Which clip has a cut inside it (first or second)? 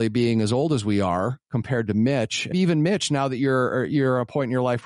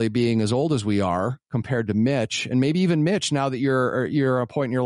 first